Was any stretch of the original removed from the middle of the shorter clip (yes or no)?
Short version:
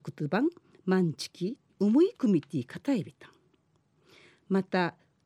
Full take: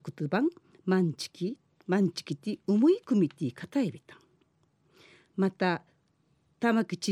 yes